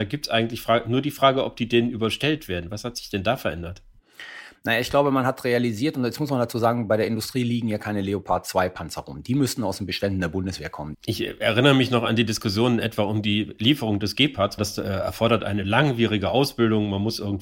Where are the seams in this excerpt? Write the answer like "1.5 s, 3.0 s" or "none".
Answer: 10.9 s, 14.6 s